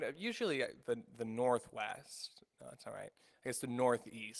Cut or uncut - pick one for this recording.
uncut